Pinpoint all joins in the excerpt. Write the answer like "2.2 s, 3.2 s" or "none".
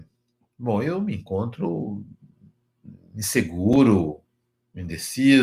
none